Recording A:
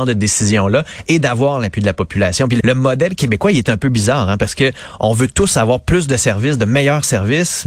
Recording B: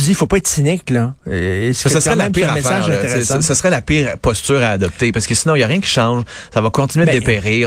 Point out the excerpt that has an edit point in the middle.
A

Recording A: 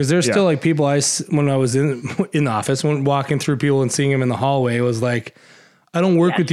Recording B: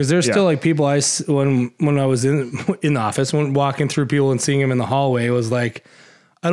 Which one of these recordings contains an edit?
A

